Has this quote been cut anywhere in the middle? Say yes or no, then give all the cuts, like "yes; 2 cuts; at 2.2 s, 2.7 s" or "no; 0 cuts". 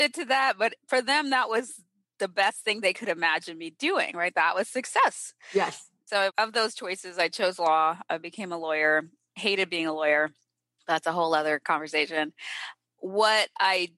yes; 1 cut; at 6.3 s